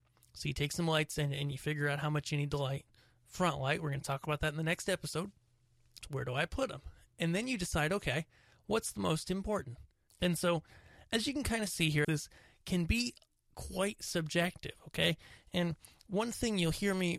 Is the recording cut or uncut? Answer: cut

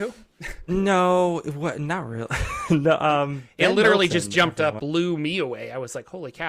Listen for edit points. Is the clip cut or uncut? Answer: cut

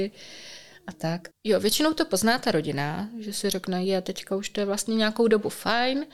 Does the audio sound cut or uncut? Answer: cut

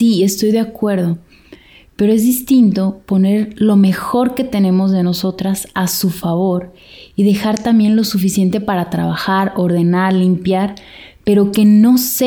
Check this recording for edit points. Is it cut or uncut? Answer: uncut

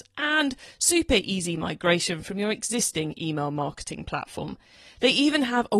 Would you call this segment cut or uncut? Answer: uncut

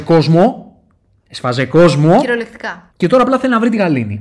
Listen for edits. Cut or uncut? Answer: cut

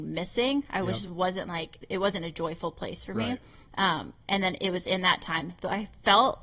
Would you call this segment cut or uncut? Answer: uncut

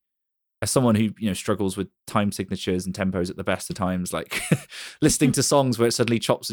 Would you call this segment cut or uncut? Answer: uncut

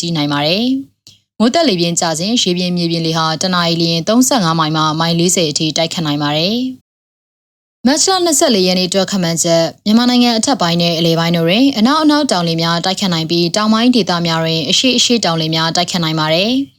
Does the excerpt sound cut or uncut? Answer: cut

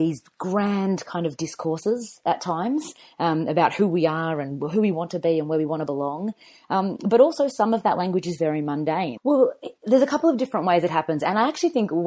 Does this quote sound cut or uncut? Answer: cut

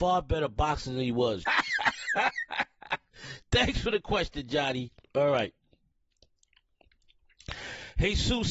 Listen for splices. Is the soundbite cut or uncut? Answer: cut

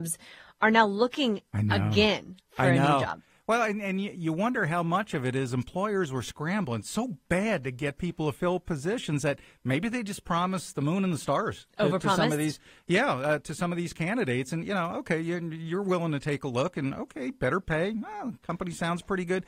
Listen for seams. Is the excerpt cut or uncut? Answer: uncut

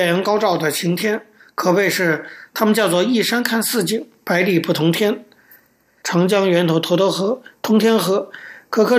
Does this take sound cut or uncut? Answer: cut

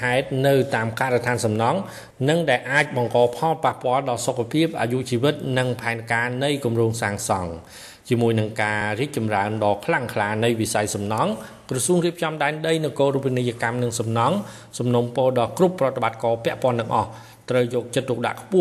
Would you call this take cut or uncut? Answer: uncut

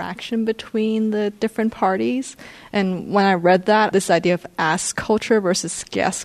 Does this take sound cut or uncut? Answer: cut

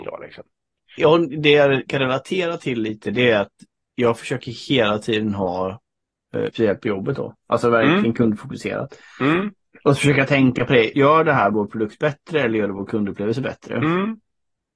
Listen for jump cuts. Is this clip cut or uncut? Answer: cut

